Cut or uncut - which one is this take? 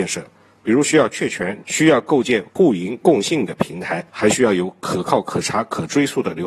cut